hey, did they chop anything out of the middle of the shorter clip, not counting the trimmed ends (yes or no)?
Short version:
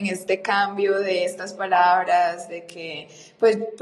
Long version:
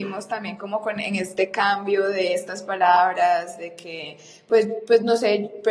no